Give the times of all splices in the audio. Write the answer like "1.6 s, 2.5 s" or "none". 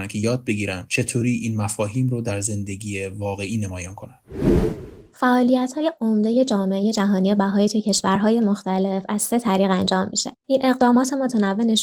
10.4 s